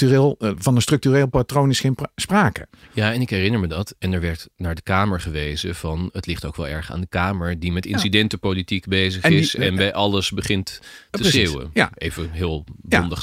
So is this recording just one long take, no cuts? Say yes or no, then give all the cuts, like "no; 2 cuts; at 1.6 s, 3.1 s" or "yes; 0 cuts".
yes; 0 cuts